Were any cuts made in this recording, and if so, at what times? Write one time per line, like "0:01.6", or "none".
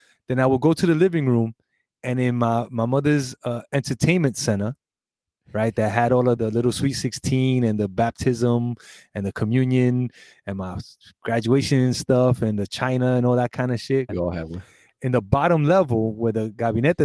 0:06.4
0:14.1

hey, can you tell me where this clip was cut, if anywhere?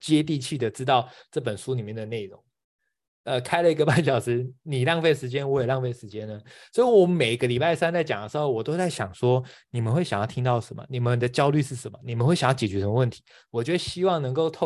0:03.1

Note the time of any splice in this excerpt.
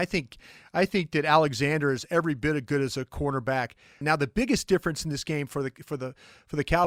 0:04.0

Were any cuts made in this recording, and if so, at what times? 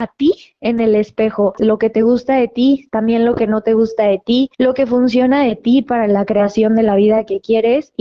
0:01.6

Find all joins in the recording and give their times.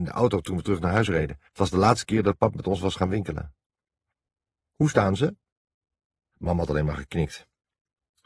0:01.5
0:06.3

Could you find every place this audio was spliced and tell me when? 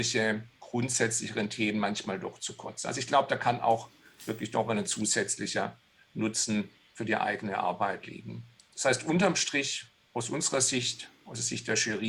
none

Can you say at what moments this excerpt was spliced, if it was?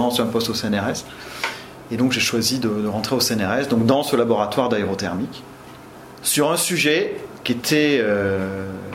none

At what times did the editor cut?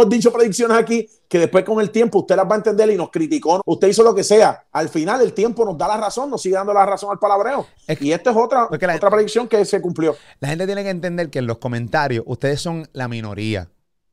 0:03.6
0:04.7
0:08.7

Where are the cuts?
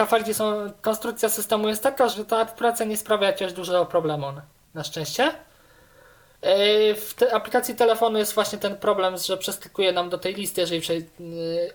0:02.1

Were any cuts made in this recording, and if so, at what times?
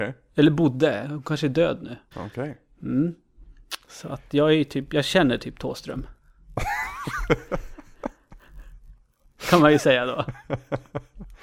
0:02.1

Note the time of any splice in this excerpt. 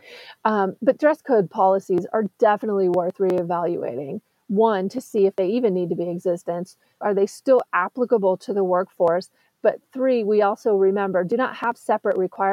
0:07.0

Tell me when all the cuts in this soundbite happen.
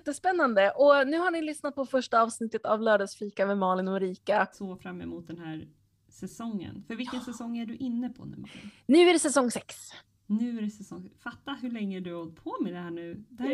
0:04.5

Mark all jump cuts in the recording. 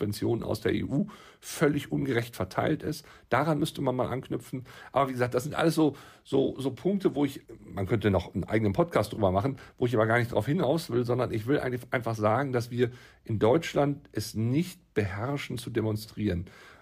none

